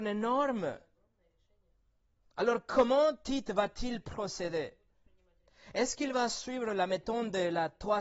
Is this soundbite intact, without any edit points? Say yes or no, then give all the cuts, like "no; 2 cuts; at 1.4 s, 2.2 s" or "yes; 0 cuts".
yes; 0 cuts